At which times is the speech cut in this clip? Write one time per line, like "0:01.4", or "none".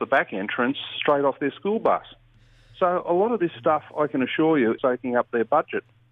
0:04.8